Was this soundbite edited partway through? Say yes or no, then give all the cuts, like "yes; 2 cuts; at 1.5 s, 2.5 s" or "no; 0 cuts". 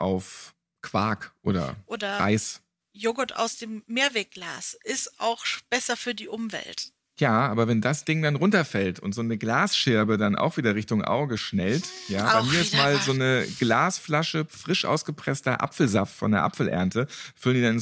no; 0 cuts